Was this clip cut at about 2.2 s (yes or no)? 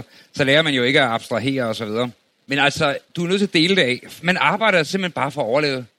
no